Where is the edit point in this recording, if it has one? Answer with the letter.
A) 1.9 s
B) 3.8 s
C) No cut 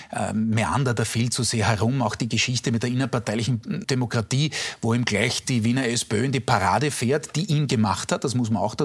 B